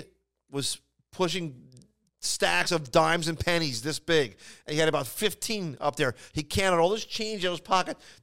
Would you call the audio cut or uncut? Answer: uncut